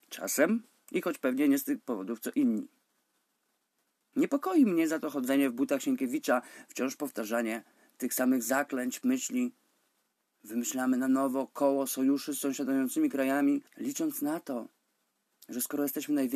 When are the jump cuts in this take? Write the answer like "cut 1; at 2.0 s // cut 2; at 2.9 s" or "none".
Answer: cut 1; at 9.0 s // cut 2; at 13.7 s